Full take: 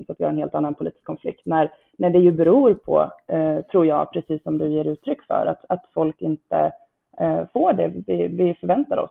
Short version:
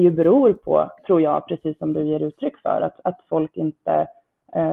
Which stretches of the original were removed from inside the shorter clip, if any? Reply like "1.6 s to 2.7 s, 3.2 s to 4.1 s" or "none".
3.2 s to 3.6 s